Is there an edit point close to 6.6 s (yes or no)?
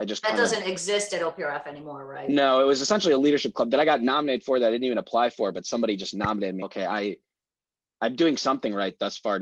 yes